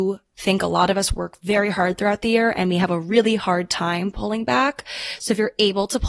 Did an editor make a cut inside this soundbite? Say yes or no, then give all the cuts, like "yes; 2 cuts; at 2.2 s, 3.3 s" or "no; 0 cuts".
no; 0 cuts